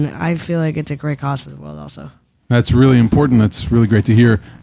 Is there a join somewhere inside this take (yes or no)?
no